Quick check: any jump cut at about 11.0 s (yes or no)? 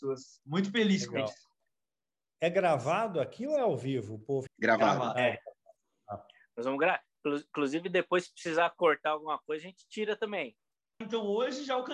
yes